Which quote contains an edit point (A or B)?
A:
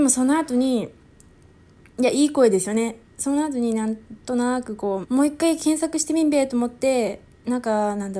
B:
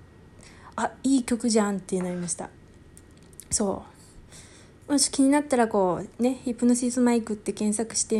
A